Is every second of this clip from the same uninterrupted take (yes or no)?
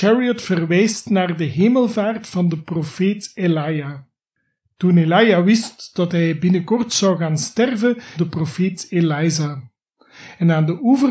no